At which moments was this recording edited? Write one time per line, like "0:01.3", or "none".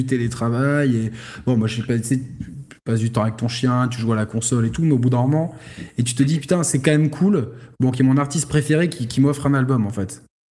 none